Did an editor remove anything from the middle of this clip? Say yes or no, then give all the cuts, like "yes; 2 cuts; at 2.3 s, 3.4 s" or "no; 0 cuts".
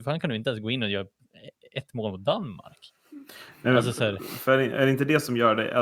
no; 0 cuts